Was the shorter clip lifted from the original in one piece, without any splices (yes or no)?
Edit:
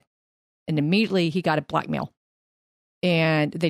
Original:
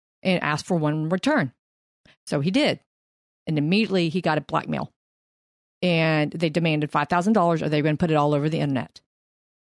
yes